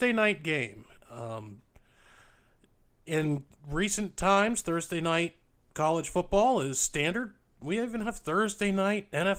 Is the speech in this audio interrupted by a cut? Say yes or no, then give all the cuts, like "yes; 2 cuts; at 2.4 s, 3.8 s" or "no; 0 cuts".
no; 0 cuts